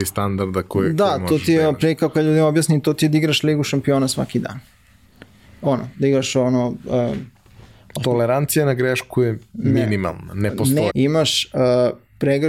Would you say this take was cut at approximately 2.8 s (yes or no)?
no